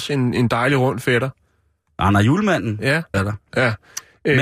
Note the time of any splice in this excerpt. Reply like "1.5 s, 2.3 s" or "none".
3.1 s